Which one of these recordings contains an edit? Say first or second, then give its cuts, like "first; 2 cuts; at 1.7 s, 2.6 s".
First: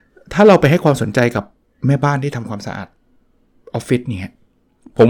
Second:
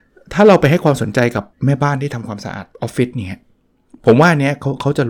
second; 2 cuts; at 1.5 s, 2.7 s